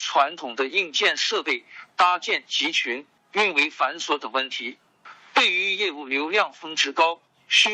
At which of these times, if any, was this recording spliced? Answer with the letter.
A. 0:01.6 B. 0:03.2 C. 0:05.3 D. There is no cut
B